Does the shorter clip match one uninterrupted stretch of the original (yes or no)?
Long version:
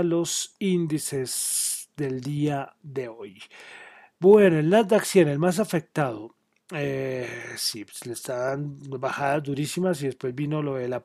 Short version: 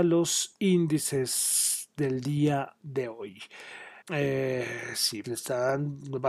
no